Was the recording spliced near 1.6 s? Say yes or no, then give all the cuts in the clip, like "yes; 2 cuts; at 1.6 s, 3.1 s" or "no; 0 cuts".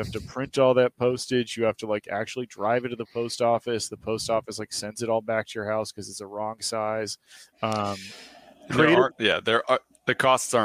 no; 2 cuts; at 7.5 s, 9.1 s